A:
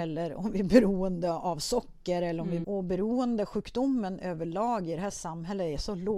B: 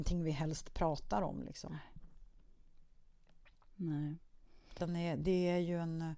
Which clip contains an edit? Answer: A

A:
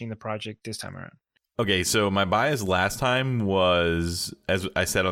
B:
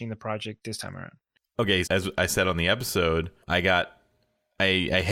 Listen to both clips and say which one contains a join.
B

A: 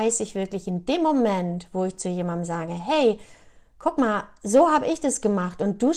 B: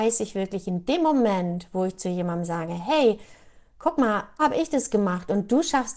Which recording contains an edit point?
B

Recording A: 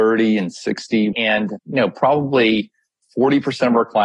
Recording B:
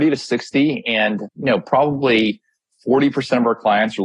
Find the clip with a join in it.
A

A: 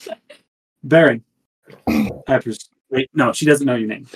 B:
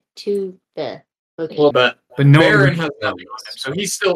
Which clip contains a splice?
B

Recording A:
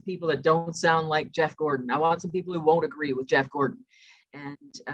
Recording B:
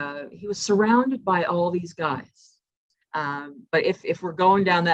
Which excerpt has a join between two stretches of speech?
B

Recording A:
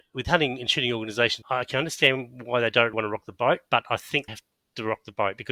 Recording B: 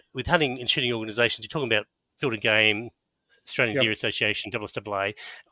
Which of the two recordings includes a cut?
A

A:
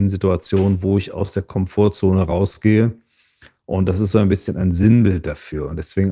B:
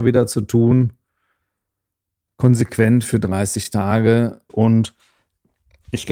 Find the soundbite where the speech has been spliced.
B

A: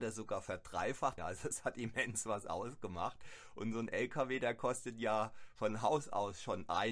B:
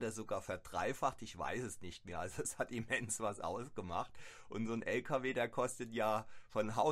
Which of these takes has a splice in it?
A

